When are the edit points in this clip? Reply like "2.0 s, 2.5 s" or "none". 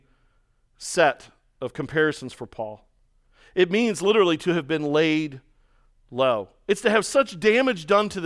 none